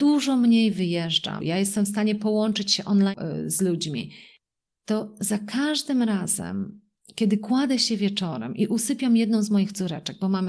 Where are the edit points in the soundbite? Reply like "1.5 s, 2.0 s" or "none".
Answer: 1.4 s